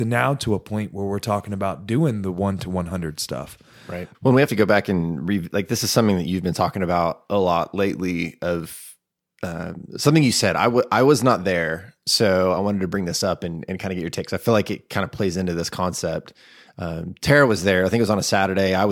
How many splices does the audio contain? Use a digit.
1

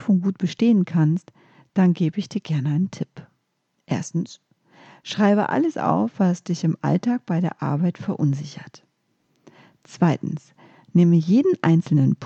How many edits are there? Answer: 0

